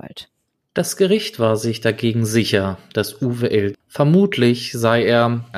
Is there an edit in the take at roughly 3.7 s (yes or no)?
yes